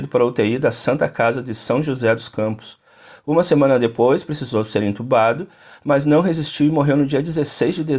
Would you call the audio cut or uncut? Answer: uncut